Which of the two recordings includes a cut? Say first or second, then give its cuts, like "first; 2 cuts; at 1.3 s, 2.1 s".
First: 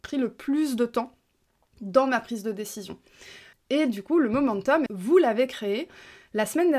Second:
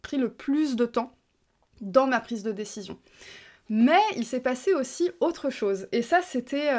first; 2 cuts; at 3.5 s, 4.9 s